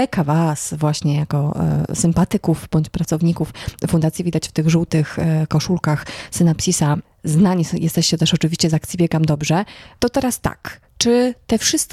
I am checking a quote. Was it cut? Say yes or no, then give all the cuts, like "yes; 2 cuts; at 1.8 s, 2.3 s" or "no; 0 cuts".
no; 0 cuts